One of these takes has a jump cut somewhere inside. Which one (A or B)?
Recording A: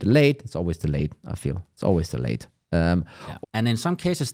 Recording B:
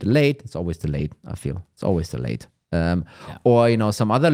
A